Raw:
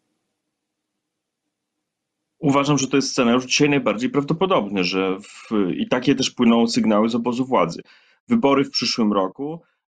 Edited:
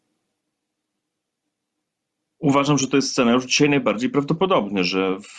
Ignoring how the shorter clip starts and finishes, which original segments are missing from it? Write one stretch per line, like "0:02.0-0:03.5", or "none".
none